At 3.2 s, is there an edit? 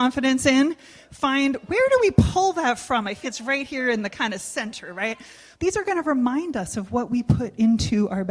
yes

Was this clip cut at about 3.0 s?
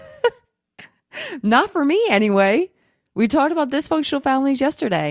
no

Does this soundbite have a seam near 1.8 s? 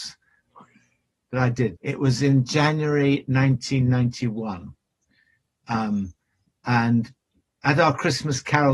yes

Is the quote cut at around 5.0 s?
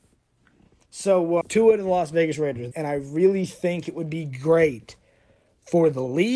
no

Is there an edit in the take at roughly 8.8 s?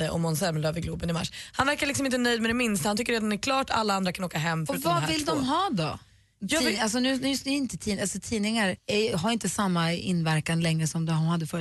yes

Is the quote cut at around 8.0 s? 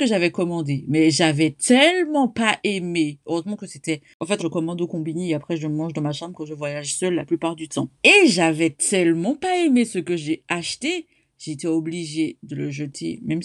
yes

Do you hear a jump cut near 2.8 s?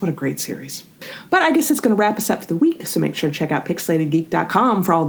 no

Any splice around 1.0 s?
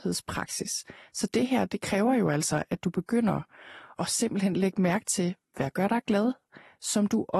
no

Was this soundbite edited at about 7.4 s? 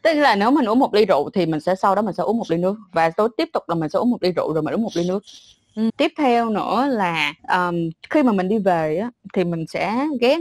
yes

